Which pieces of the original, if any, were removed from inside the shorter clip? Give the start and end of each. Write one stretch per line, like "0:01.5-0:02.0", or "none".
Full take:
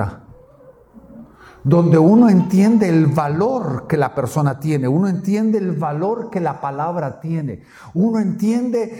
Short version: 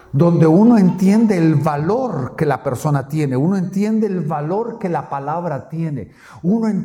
none

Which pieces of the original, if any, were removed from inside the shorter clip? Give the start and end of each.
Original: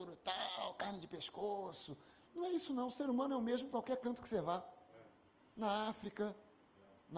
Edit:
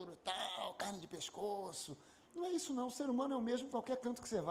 none

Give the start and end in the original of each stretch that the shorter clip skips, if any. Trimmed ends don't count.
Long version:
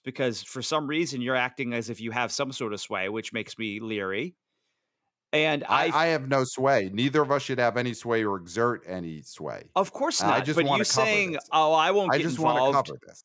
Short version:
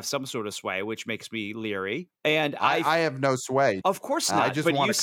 0:04.4-0:05.2
0:06.9-0:09.7

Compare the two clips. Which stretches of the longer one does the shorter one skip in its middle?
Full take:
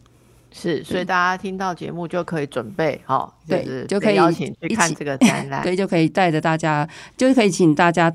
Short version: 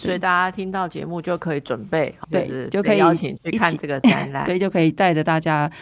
0:03.1-0:03.4

